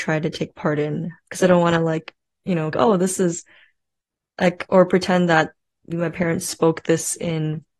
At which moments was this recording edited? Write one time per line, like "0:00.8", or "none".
0:02.7
0:05.9